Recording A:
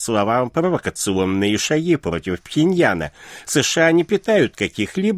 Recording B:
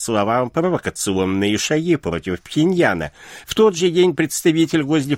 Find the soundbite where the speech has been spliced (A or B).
B